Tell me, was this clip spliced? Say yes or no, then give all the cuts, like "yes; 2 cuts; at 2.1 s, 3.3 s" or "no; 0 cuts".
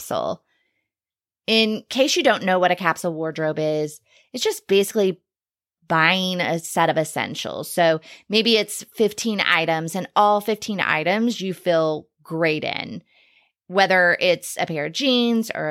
no; 0 cuts